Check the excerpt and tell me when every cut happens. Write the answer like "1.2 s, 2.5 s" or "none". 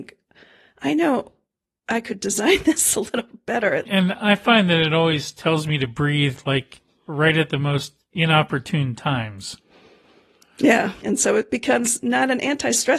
3.9 s, 11.0 s